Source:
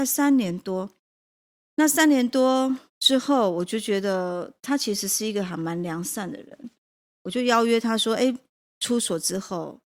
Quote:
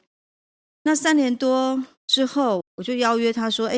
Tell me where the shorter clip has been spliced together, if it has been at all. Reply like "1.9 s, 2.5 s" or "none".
2.6 s